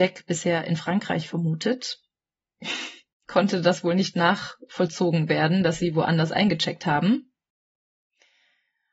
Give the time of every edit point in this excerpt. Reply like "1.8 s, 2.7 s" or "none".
3.2 s